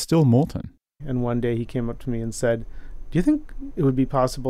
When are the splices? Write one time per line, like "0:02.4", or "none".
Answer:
0:01.0